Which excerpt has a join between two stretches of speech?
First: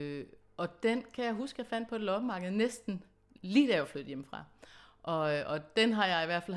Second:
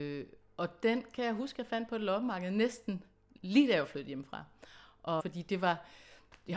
second; 1 cut; at 5.2 s

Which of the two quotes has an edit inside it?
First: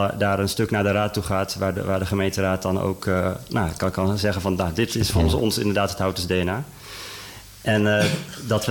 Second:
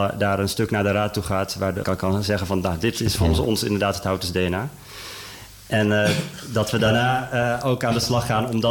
second; 1 cut; at 1.8 s

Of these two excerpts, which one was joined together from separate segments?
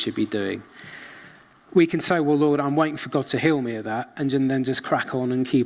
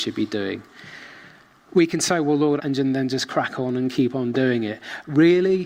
second; 1 cut; at 2.6 s

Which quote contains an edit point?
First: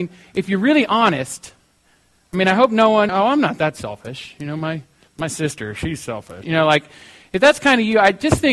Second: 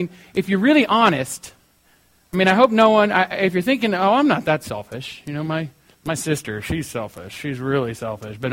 first; 2 cuts; at 3.1 s, 6.4 s

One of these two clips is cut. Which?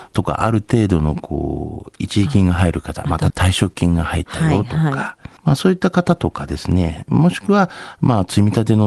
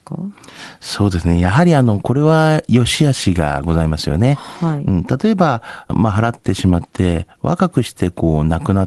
first; 2 cuts; at 3.3 s, 5.4 s

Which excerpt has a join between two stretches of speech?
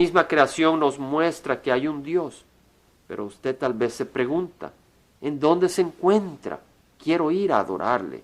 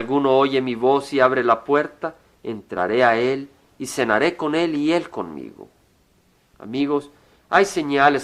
second; 1 cut; at 6.5 s

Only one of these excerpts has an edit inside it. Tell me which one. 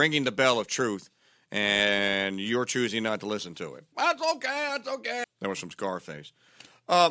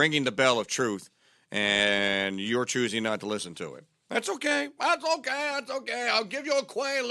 first; 2 cuts; at 3.9 s, 5.2 s

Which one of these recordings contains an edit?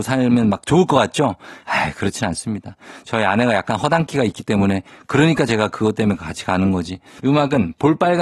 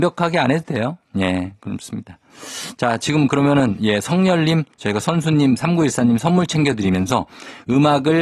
first; 1 cut; at 7.2 s

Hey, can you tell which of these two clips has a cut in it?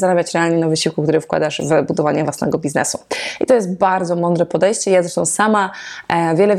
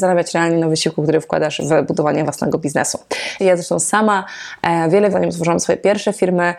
second; 2 cuts; at 3.4 s, 5.1 s

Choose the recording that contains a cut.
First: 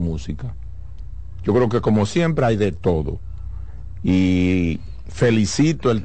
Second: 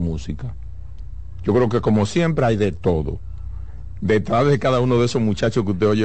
second; 1 cut; at 4.0 s

